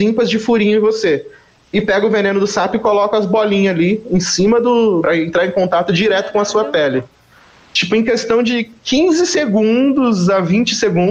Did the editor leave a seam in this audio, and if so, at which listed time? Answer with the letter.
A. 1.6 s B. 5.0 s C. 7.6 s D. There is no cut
B